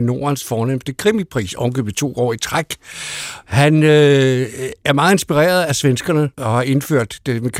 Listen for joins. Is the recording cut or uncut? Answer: uncut